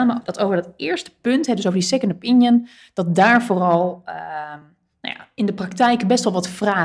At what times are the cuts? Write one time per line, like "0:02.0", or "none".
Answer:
none